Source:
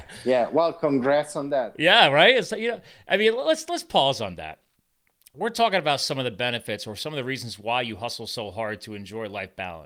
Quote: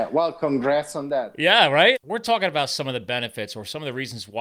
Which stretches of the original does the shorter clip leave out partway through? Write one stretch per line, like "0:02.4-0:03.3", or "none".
0:02.3-0:05.2